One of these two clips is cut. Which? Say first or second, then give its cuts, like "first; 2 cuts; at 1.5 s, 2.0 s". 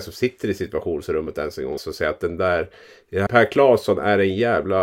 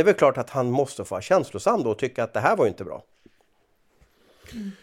first; 2 cuts; at 1.8 s, 3.3 s